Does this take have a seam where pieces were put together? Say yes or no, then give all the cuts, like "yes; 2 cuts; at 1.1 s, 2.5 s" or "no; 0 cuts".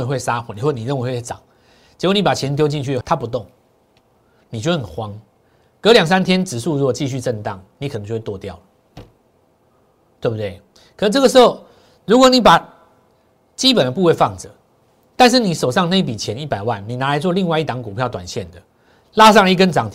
yes; 1 cut; at 3.0 s